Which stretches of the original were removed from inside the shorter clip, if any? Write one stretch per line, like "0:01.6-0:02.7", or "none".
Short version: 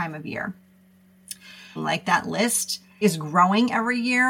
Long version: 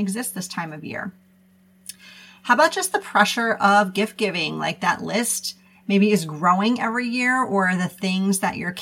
0:02.3-0:04.5
0:05.8-0:06.1